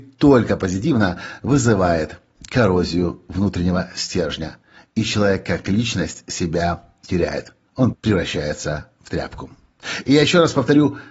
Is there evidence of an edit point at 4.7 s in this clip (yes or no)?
no